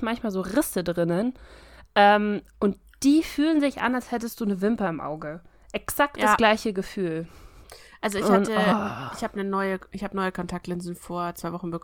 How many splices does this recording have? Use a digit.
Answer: 0